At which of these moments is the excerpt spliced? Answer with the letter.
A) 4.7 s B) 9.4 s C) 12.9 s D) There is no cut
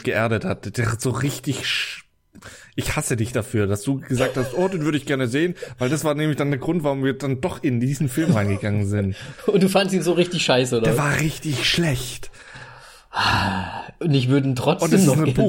D